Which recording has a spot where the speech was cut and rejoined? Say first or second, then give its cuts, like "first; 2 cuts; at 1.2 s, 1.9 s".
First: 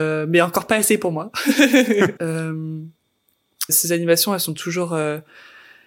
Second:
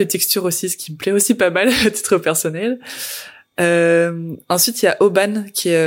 first; 2 cuts; at 2.2 s, 3.7 s